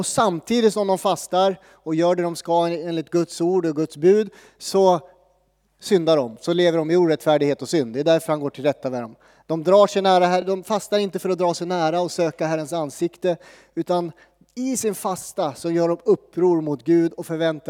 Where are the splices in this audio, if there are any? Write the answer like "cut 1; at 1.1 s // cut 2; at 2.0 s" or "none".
none